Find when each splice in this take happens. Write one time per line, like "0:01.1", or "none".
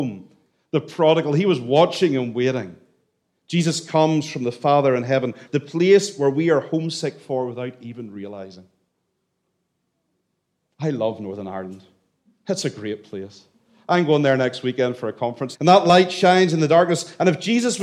0:05.5
0:15.5